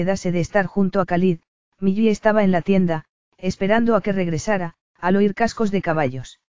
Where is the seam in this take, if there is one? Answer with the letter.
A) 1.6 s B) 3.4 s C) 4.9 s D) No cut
C